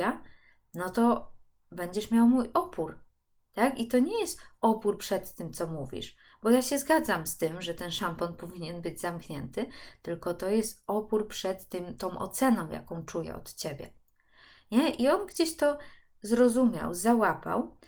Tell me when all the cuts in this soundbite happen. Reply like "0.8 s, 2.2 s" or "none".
none